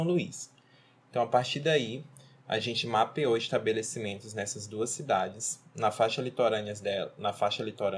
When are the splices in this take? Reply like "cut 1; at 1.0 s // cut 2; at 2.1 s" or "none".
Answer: none